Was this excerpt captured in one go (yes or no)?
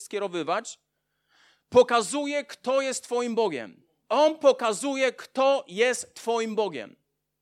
no